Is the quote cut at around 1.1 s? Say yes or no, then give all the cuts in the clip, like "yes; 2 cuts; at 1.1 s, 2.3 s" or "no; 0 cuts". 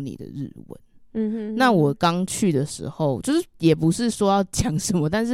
no; 0 cuts